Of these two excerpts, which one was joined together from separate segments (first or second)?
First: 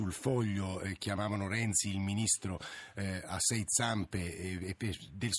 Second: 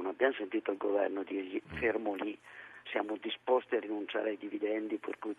second